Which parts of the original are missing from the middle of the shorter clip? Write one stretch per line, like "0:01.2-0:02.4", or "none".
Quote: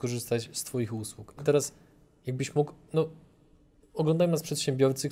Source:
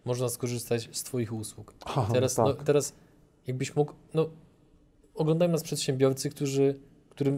0:01.8-0:02.6